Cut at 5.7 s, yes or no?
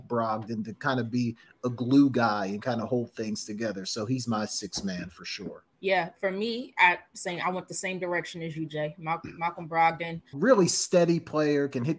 yes